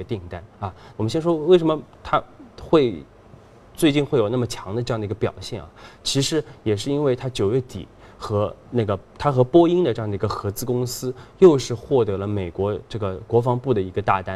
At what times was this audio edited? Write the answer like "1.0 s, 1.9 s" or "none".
0.9 s